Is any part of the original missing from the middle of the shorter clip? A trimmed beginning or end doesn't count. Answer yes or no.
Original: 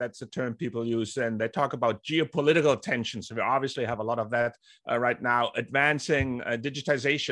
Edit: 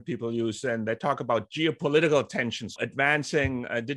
yes